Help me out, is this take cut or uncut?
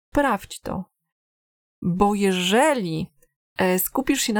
uncut